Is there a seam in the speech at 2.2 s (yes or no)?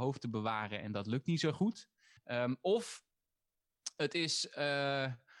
yes